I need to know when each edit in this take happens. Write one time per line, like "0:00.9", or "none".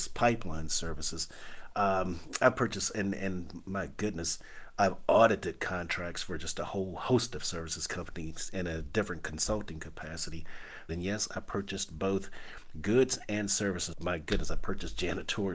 0:10.9
0:13.9